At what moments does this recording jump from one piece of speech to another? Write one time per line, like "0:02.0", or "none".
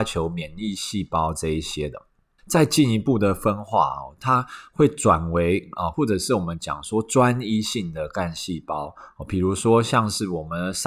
0:02.4
0:05.9